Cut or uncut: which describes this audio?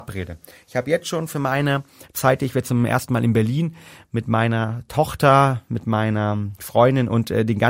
uncut